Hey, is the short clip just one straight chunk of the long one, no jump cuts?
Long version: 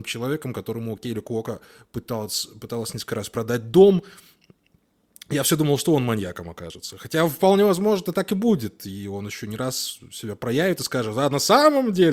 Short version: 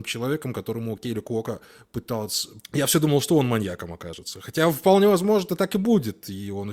no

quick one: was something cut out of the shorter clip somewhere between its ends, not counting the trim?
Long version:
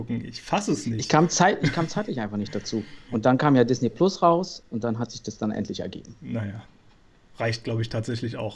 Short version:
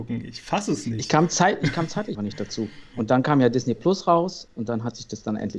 yes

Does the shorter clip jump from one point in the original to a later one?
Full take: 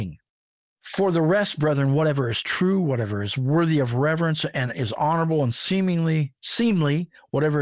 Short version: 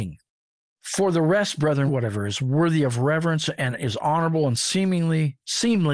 yes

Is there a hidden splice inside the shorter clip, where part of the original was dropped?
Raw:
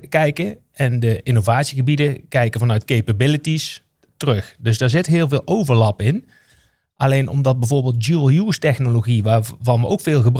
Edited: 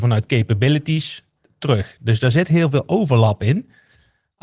no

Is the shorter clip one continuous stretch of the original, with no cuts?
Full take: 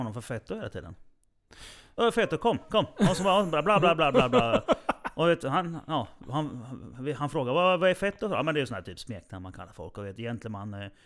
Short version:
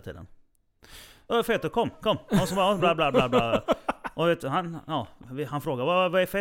no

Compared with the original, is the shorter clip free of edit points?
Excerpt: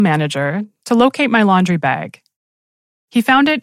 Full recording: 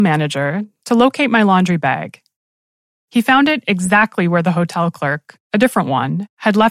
yes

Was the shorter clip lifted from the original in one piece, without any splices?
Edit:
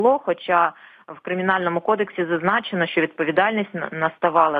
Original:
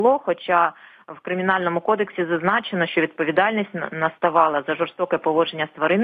yes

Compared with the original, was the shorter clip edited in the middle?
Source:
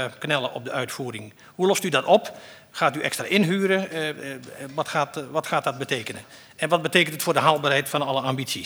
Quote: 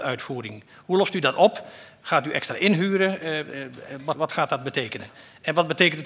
yes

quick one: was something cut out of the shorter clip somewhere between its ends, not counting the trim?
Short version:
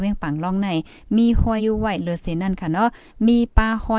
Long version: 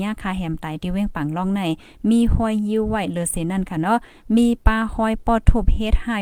yes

